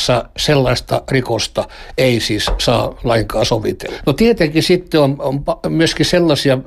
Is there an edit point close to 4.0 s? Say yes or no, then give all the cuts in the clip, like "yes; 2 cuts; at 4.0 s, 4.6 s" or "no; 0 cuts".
no; 0 cuts